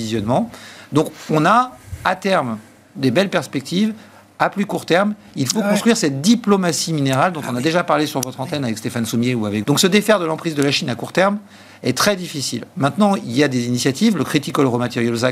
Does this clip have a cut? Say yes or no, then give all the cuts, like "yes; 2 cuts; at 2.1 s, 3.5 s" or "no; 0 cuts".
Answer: yes; 1 cut; at 9.6 s